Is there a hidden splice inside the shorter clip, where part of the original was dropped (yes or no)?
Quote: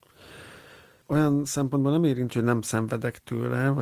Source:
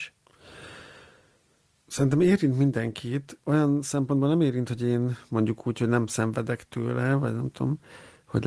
yes